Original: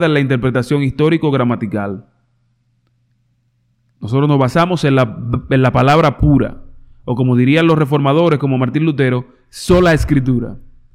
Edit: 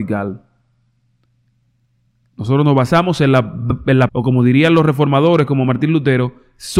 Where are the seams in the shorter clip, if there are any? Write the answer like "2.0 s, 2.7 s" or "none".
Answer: 4.1 s